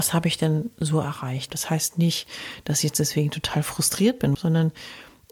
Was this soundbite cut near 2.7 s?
no; 2 cuts; at 1.5 s, 4.3 s

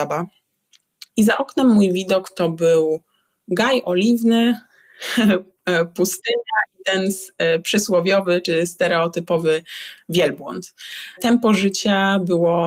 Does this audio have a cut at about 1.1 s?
yes; 1 cut; at 1.1 s

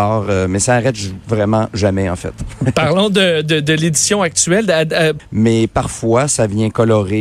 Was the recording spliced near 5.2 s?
yes; 1 cut; at 5.2 s

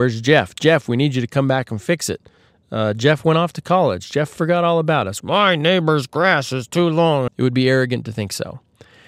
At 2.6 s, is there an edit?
no; 2 cuts; at 5.2 s, 7.3 s

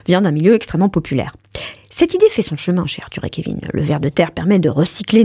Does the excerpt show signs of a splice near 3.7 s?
no; 1 cut; at 1.8 s

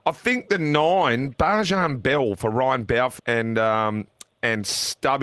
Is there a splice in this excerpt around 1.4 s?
no; 1 cut; at 3.2 s

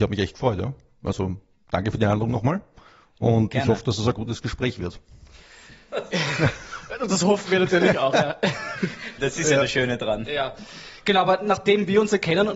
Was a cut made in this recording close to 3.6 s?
no; 1 cut; at 9.2 s

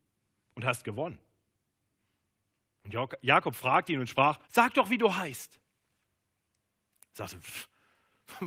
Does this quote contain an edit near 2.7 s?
no; 1 cut; at 4.4 s

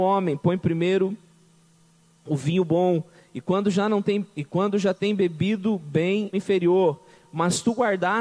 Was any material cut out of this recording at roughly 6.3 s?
yes; 1 cut; at 6.3 s

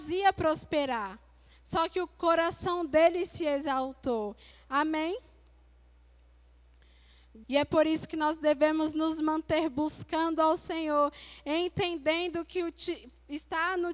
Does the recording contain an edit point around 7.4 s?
yes; 2 cuts; at 4.5 s, 7.4 s

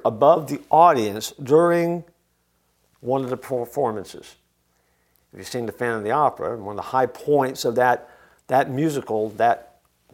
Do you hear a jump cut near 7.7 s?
no; 0 cuts

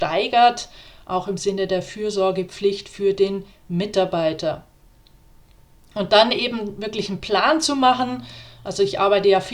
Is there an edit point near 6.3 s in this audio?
no; 0 cuts

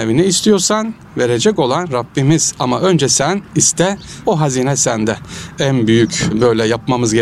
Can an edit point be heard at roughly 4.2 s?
yes; 1 cut; at 4.2 s

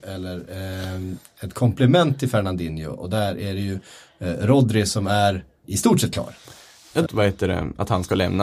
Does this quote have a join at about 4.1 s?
no; 2 cuts; at 5.6 s, 7.1 s

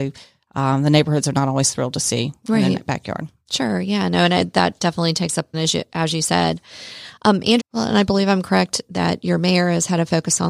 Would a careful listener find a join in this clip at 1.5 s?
no; 2 cuts; at 5.5 s, 7.6 s

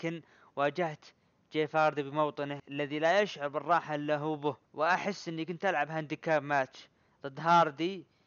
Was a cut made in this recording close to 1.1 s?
no; 2 cuts; at 2.6 s, 4.6 s

